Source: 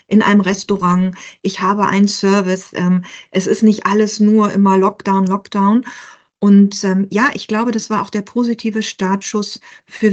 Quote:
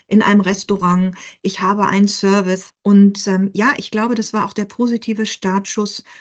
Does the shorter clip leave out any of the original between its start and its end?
yes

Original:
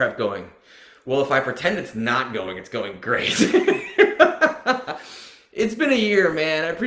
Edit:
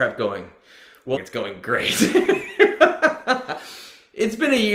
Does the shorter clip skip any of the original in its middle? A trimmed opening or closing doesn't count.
yes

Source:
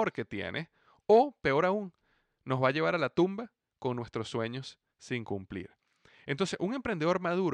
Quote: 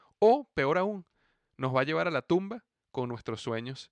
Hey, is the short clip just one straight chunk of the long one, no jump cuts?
yes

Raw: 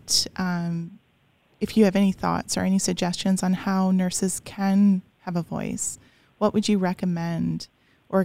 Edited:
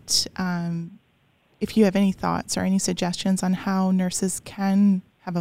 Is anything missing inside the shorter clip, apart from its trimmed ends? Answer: no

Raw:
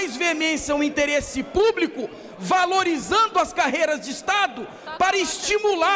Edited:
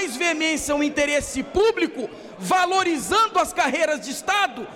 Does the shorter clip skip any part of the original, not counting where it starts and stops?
no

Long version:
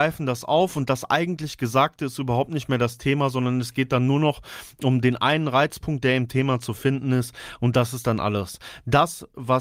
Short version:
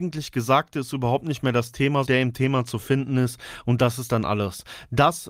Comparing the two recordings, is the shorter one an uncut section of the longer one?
no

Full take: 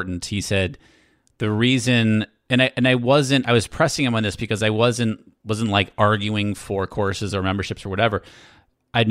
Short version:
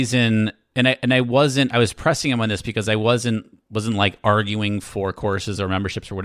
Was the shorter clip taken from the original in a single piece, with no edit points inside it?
yes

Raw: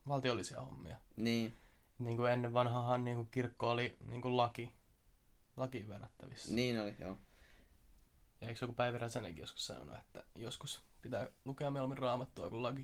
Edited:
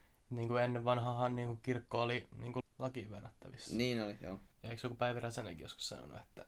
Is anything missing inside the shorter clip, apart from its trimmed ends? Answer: yes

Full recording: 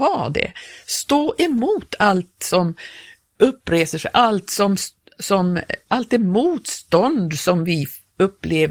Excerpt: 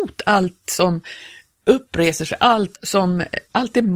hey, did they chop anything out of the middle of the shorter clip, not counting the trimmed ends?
yes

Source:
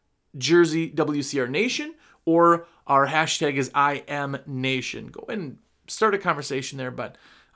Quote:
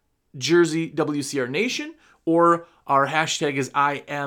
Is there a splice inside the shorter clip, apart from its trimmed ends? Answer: no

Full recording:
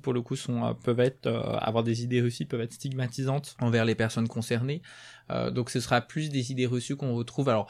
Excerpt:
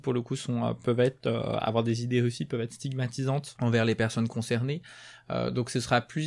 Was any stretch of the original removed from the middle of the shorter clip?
no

